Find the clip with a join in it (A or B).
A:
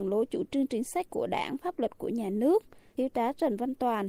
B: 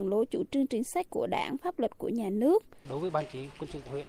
B